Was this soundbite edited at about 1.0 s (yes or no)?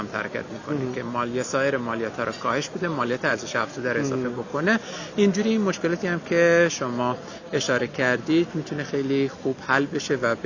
no